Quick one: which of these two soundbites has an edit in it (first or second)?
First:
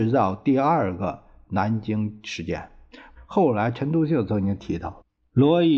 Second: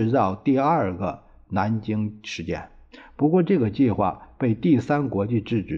first